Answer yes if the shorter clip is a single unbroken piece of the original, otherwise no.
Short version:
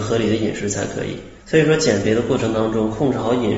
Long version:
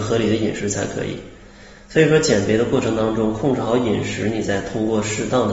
no